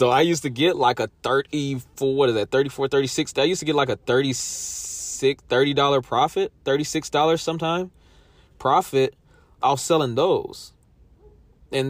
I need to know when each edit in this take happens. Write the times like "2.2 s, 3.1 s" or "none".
9.6 s